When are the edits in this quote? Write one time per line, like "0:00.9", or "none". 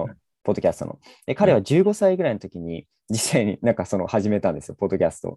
none